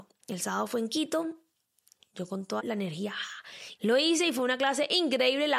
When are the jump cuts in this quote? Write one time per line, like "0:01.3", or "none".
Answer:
0:02.6
0:03.8